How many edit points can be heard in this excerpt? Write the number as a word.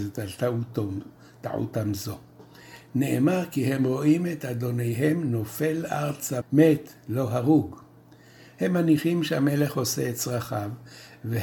two